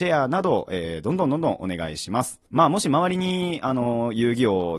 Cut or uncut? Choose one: cut